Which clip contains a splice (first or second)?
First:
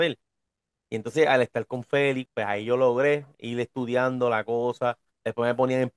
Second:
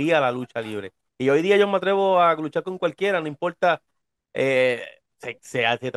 first